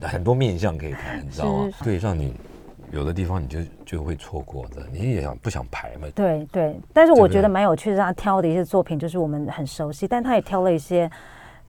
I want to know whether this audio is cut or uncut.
cut